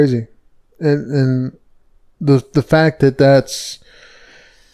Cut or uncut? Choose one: uncut